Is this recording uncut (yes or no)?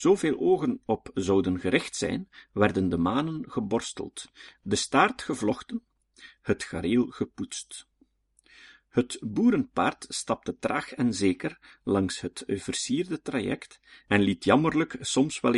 yes